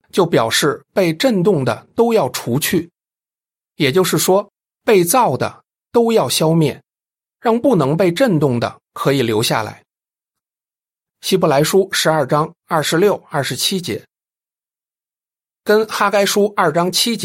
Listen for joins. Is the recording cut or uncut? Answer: uncut